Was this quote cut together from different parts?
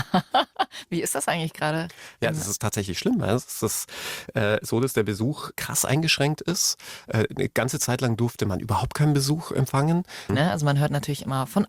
yes; 2 cuts; at 5.6 s, 10.3 s

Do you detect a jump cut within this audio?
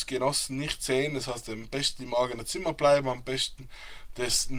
no; 0 cuts

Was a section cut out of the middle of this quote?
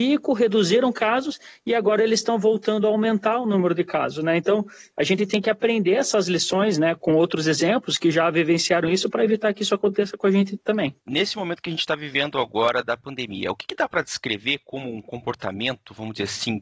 no; 0 cuts

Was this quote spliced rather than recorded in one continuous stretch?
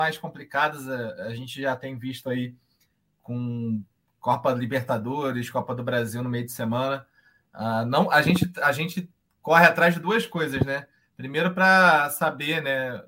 no; 0 cuts

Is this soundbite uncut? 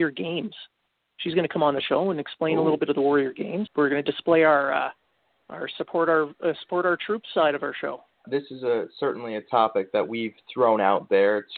no; 2 cuts; at 3.7 s, 8.2 s

